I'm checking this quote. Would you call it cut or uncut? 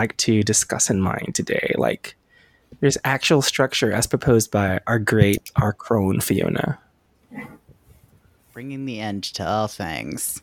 uncut